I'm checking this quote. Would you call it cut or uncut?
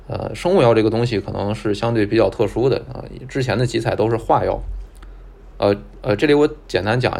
uncut